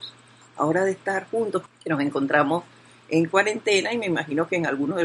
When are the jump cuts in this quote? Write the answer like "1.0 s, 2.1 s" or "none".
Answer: 1.7 s